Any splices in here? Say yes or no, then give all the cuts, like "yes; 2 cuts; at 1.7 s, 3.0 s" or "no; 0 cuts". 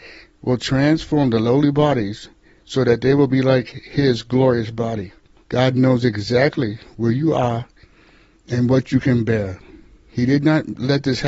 yes; 1 cut; at 5.4 s